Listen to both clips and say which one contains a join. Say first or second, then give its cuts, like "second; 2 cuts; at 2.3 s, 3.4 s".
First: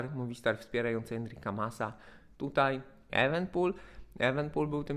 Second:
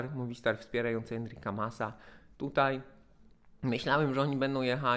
first; 1 cut; at 3.1 s